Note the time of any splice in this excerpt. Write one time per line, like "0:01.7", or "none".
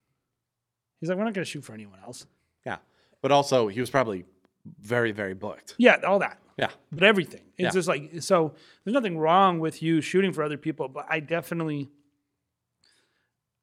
none